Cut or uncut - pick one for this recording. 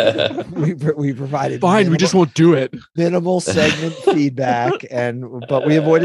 uncut